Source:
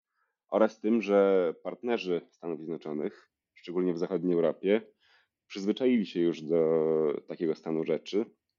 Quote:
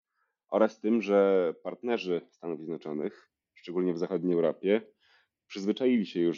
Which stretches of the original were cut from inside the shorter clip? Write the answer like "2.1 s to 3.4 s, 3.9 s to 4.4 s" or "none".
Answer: none